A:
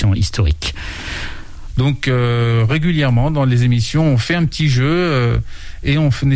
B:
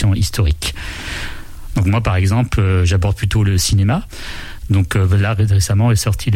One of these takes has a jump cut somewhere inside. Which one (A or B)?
A